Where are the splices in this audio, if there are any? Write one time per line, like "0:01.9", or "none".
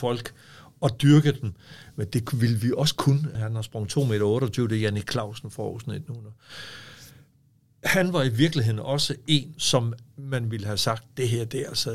0:03.4
0:09.6